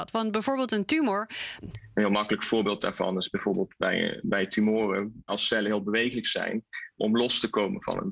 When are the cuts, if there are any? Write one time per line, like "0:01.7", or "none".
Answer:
0:01.6
0:05.3
0:07.0